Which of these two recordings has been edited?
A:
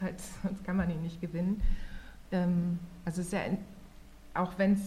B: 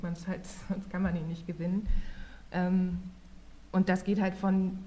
A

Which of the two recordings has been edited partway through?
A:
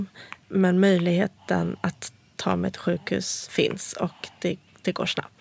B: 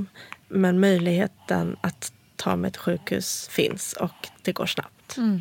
B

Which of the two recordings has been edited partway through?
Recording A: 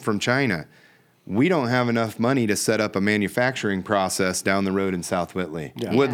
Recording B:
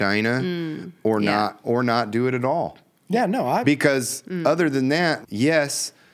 B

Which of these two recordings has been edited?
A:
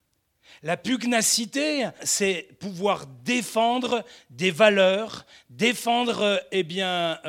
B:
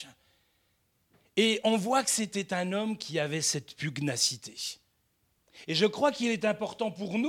A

